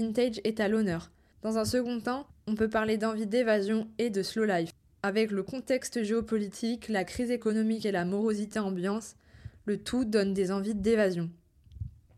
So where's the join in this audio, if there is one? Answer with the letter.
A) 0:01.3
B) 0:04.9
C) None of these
A